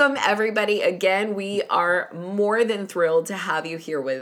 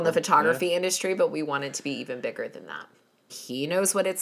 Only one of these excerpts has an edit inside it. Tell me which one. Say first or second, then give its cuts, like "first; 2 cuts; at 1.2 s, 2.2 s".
second; 1 cut; at 3.3 s